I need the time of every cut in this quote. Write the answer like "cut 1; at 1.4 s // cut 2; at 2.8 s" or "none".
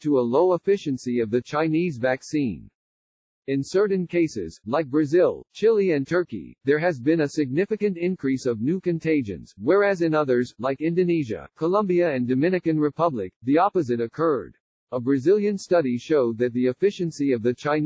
cut 1; at 3.3 s // cut 2; at 14.7 s